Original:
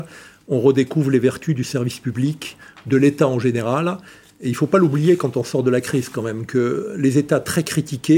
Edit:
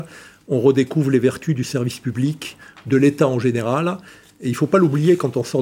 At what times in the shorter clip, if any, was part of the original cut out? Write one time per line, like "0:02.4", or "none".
none

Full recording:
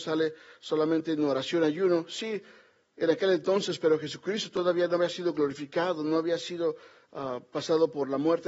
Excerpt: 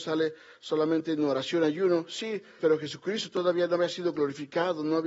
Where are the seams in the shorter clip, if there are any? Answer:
0:02.6

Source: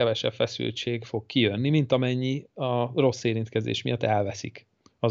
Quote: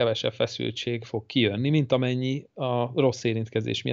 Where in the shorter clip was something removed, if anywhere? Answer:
none

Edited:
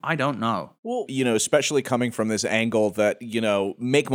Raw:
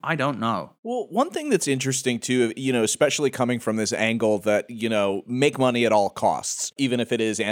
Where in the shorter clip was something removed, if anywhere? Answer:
0:01.1

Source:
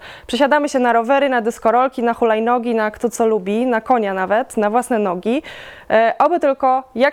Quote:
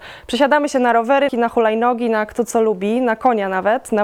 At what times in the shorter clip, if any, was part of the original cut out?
0:01.3

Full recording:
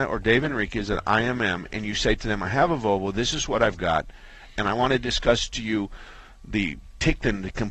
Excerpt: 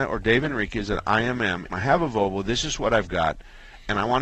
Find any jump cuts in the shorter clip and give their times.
0:01.7

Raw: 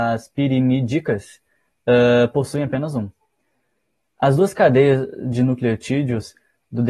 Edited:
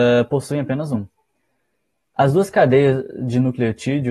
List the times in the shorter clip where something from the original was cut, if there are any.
none

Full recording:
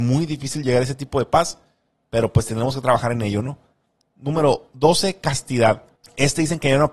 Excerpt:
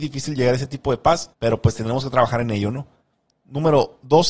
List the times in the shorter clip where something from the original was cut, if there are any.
0:01.3

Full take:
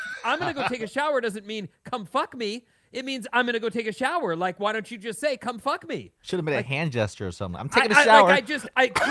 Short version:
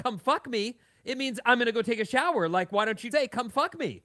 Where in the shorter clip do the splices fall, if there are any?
0:03.1

